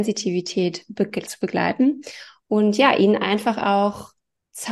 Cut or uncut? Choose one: uncut